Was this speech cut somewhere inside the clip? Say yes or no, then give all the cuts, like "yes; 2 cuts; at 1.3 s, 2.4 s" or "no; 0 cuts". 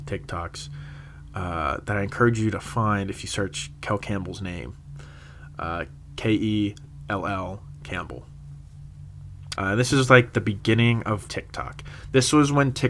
yes; 2 cuts; at 9.5 s, 11.3 s